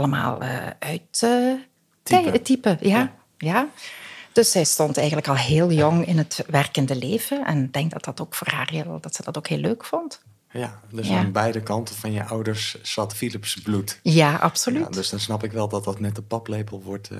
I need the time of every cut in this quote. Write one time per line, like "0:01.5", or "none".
0:13.1

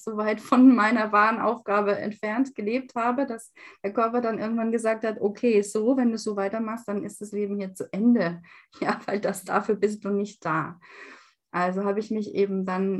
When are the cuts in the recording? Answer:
none

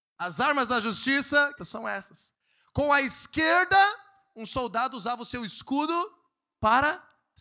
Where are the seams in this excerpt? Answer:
0:01.6

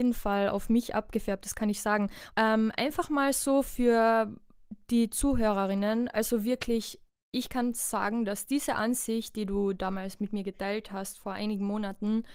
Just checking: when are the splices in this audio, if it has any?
0:02.3
0:06.1

